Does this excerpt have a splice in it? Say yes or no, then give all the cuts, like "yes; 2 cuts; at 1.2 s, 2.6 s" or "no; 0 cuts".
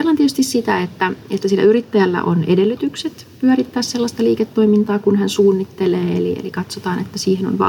no; 0 cuts